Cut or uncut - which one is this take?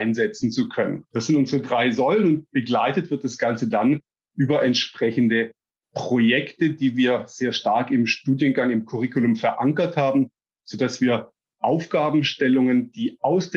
uncut